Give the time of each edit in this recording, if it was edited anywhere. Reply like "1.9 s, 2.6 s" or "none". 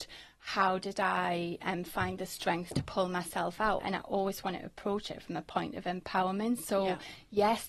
3.8 s